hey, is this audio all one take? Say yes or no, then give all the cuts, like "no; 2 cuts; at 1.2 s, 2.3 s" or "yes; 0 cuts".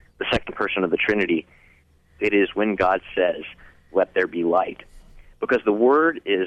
no; 1 cut; at 2.2 s